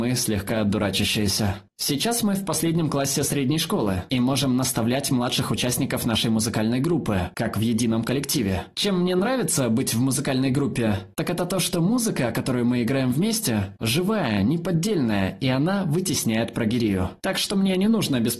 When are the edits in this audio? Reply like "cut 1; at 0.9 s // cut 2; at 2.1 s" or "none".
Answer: none